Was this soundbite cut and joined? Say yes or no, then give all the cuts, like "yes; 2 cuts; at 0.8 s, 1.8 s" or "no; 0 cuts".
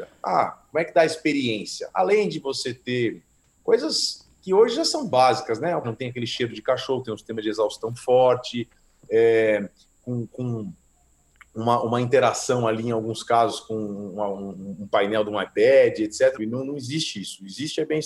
yes; 2 cuts; at 5.8 s, 16.4 s